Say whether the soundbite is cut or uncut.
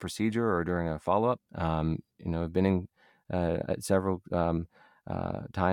cut